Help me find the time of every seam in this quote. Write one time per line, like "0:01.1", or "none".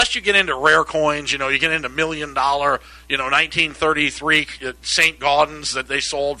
none